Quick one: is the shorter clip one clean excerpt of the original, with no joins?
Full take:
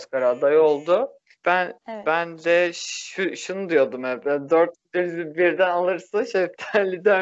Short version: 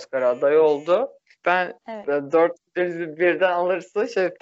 no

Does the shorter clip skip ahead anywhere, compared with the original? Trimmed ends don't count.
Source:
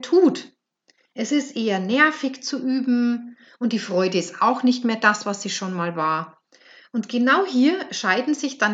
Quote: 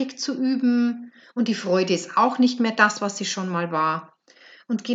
no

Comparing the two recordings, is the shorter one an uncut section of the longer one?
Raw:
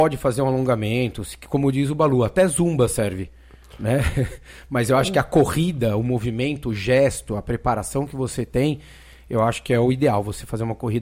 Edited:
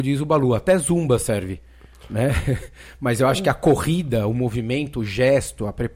yes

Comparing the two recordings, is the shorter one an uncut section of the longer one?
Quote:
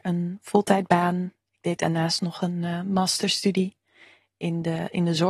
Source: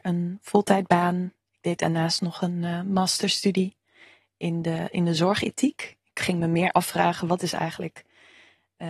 yes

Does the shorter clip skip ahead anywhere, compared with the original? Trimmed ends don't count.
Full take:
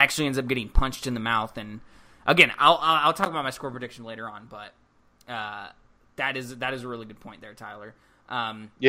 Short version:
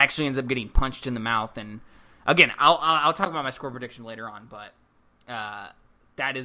no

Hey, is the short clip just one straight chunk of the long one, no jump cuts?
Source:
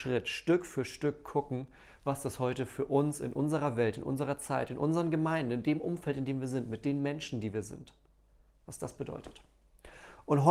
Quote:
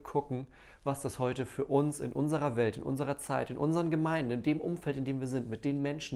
yes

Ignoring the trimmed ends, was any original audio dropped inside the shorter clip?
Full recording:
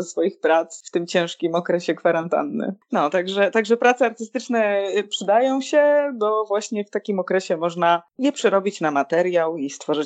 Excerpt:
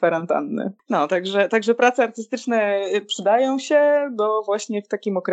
no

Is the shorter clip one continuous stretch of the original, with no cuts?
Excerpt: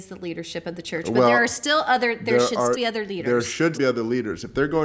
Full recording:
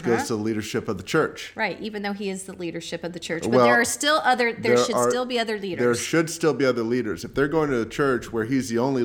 no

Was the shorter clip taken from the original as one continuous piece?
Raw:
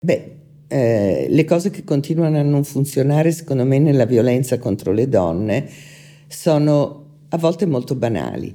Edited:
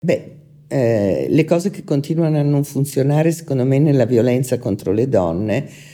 yes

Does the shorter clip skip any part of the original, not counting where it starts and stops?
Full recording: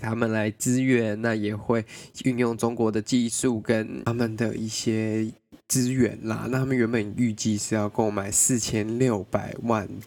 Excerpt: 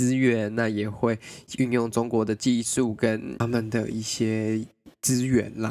no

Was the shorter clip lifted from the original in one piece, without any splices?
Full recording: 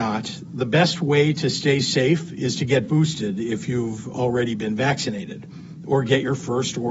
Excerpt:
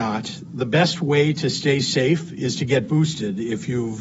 yes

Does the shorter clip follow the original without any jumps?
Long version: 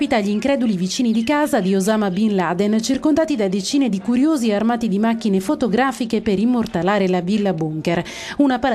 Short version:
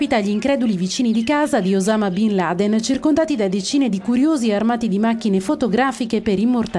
yes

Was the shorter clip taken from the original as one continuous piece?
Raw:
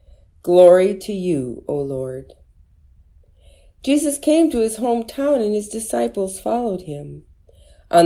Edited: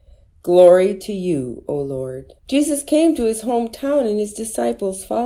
no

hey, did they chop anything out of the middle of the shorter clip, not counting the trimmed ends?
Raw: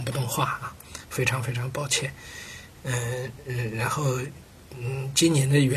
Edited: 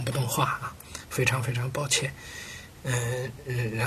no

